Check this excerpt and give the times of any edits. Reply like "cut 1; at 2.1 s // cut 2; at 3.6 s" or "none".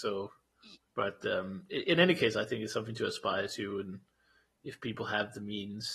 none